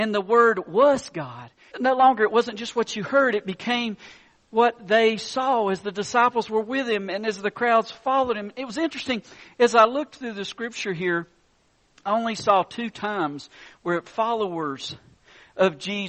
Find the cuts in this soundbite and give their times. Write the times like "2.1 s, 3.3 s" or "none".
1.7 s